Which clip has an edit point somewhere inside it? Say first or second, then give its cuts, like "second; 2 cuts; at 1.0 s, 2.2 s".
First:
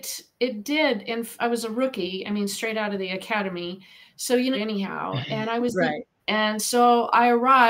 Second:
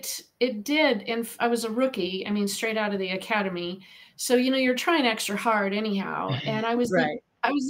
first; 2 cuts; at 4.5 s, 6.2 s